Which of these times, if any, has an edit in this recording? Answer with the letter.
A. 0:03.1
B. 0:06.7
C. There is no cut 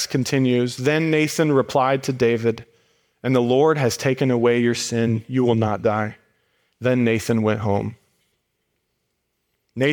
B